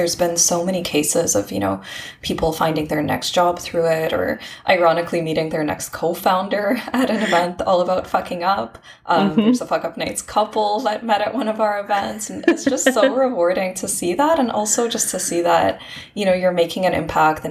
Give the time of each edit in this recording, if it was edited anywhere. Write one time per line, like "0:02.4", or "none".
none